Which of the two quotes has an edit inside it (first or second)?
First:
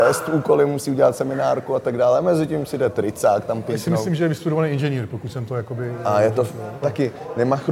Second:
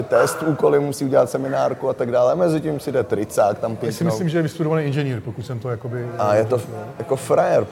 first